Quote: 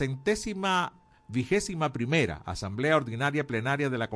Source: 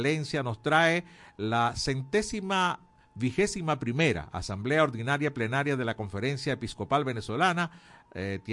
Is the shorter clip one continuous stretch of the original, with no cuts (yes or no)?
yes